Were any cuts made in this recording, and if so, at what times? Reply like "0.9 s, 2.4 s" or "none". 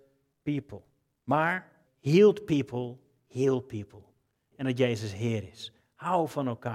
1.8 s, 4.5 s